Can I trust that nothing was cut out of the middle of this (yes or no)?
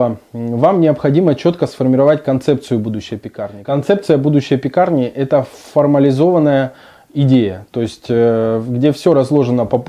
yes